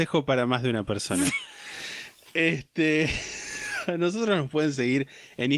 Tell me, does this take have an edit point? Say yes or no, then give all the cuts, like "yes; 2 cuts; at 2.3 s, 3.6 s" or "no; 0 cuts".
no; 0 cuts